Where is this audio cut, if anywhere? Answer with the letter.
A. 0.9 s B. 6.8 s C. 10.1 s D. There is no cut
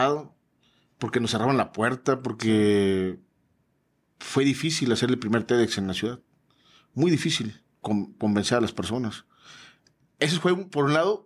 D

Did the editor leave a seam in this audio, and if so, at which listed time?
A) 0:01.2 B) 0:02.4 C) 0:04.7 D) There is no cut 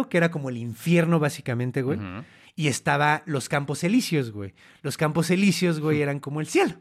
D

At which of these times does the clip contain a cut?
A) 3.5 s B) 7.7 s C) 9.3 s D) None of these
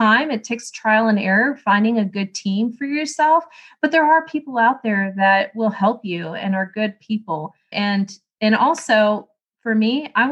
B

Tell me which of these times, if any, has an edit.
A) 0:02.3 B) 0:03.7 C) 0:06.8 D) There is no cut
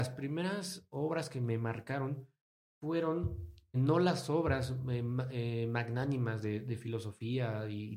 B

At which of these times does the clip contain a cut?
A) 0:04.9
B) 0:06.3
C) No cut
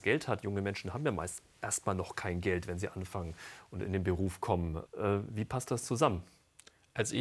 A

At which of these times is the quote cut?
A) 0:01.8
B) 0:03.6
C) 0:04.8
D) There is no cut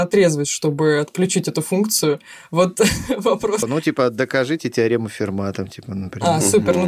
B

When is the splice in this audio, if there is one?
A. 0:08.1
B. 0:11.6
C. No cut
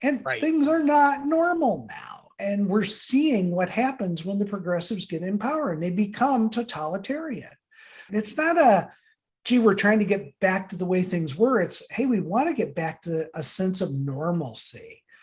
A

